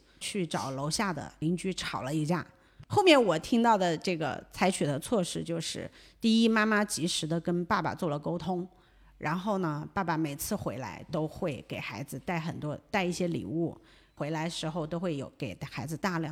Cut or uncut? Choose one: cut